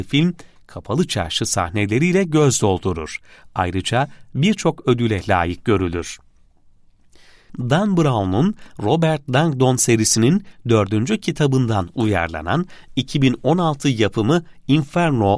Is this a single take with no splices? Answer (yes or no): yes